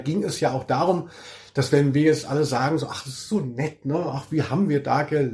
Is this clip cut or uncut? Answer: uncut